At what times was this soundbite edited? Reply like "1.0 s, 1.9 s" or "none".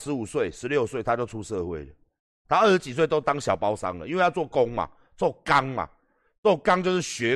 2.4 s